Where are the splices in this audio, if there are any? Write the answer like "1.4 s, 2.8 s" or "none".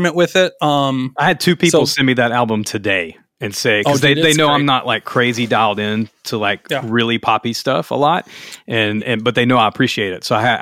none